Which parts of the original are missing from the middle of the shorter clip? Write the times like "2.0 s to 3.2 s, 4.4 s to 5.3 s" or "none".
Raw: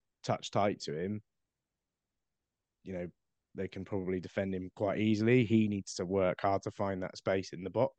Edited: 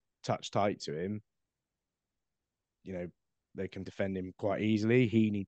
3.9 s to 4.2 s